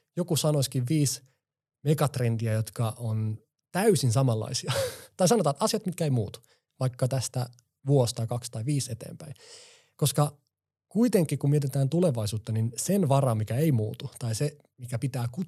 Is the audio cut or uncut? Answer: uncut